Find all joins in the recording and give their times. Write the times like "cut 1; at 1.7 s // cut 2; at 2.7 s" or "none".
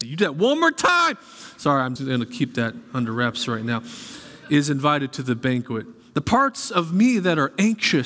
cut 1; at 2.0 s